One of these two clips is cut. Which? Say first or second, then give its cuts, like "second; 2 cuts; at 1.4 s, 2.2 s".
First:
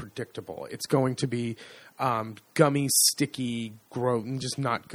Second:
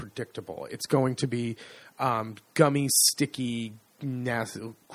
first; 1 cut; at 3.9 s